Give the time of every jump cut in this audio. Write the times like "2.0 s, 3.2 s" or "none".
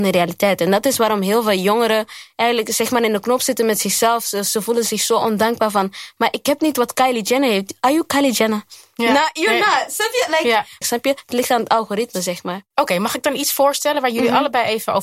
10.8 s